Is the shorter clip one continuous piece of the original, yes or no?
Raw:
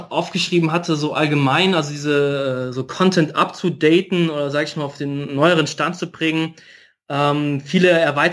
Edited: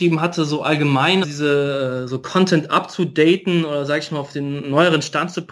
no